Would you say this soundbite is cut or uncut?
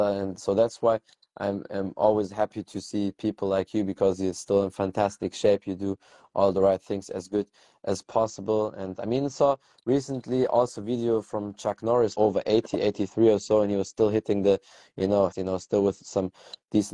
cut